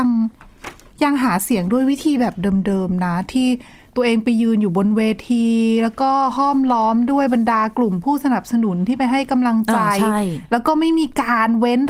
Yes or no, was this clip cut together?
no